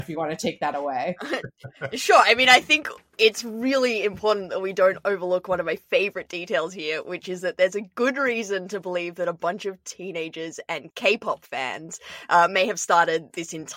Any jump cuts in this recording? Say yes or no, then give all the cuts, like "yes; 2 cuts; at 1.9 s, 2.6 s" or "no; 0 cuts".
no; 0 cuts